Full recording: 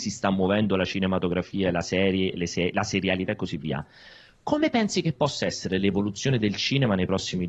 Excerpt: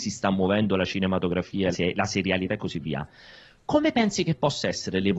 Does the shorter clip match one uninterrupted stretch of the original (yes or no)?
no